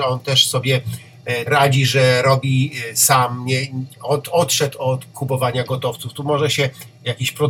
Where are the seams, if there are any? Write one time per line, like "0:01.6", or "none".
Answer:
0:01.5